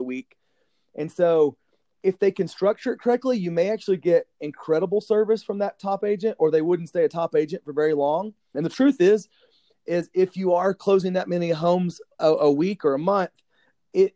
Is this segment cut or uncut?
cut